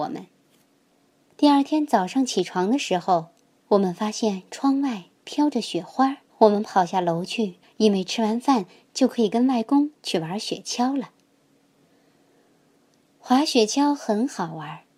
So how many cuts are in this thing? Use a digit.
2